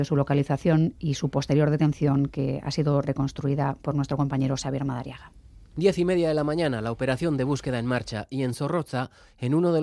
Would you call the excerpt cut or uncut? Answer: uncut